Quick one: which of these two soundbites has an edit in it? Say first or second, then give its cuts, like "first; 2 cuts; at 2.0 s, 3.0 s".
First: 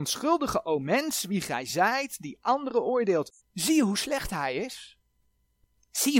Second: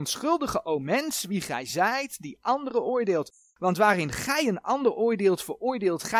first; 1 cut; at 3.4 s